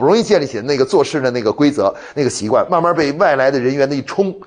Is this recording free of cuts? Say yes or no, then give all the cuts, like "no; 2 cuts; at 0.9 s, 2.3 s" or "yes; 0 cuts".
yes; 0 cuts